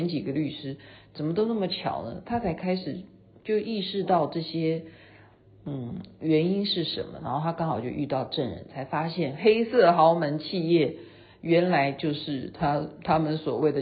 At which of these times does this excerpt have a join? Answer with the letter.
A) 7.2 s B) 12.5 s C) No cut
C